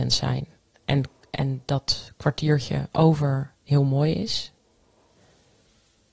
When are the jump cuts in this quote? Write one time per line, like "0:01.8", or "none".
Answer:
none